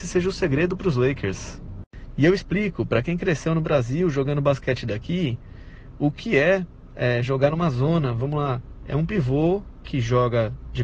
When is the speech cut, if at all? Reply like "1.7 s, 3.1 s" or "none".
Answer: none